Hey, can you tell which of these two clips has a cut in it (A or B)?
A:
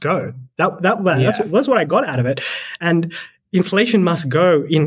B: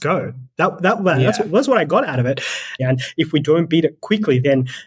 B